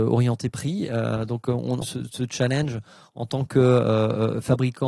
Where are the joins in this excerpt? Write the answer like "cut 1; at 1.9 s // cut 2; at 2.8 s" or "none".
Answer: cut 1; at 1.8 s